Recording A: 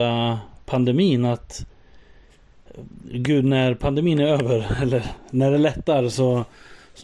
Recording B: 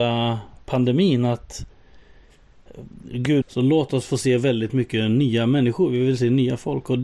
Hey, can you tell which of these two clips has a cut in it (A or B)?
B